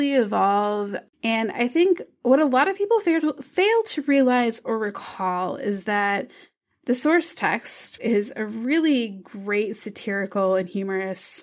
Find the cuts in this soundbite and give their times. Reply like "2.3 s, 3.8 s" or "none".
1.1 s, 8.0 s